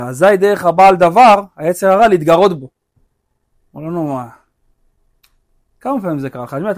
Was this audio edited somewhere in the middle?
no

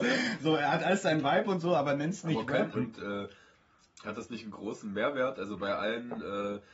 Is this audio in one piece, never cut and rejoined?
no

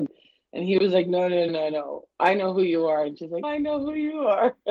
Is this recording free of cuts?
no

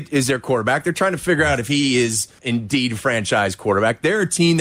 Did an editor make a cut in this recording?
yes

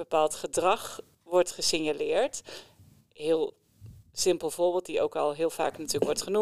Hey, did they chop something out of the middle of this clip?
no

